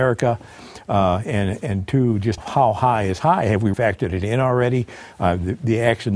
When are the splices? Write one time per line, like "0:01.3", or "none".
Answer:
0:02.4
0:03.7